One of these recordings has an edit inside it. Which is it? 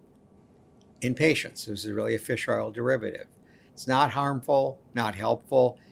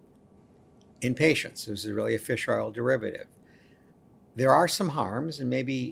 first; 1 cut; at 3.7 s

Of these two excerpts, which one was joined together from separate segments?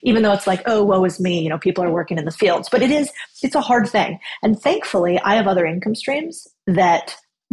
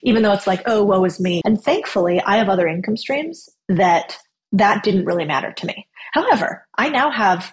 second; 1 cut; at 1.4 s

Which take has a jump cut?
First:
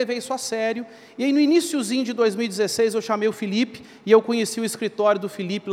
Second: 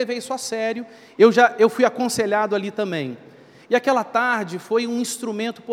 second; 1 cut; at 1.1 s

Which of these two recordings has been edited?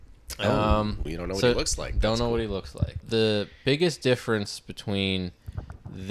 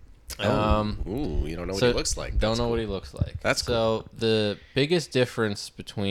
first; 2 cuts; at 1.1 s, 3.0 s

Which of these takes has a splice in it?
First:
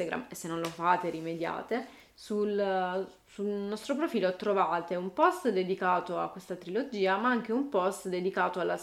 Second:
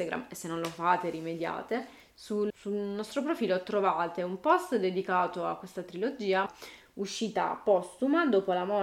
second; 2 cuts; at 2.5 s, 6.5 s

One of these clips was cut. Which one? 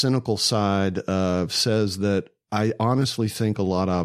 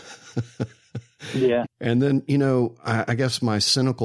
second; 1 cut; at 1.6 s

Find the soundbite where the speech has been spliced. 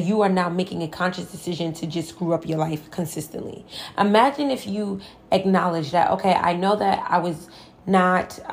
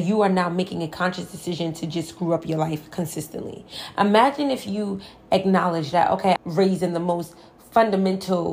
second; 1 cut; at 6.4 s

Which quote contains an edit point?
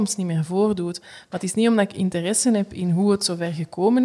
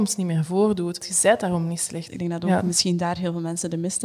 second; 2 cuts; at 1.0 s, 2.1 s

